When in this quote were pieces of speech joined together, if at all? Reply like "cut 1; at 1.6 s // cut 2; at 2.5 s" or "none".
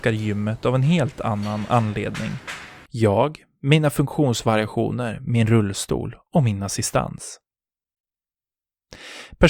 cut 1; at 2.9 s